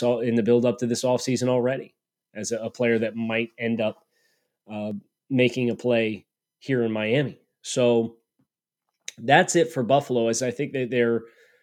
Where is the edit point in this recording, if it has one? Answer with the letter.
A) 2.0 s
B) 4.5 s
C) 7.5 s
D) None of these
D